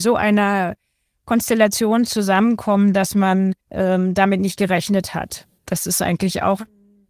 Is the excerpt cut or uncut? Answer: cut